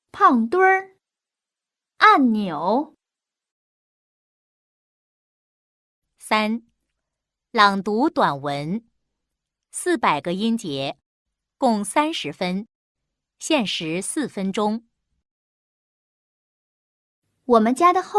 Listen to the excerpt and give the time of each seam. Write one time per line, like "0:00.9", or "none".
none